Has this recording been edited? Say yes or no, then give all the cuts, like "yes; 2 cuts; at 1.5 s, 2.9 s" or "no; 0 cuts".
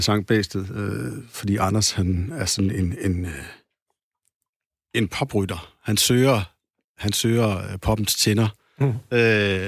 no; 0 cuts